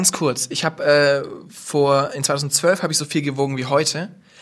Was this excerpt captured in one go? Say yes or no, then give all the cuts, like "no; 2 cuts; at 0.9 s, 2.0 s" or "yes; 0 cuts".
yes; 0 cuts